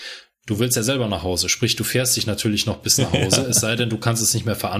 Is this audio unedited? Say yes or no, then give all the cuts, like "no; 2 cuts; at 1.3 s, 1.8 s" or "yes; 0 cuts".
yes; 0 cuts